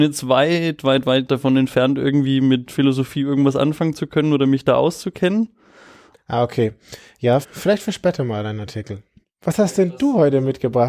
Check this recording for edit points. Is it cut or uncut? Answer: cut